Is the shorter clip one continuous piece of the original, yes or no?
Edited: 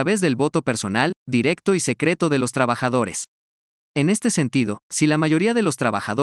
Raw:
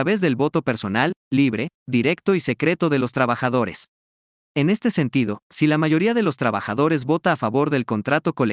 no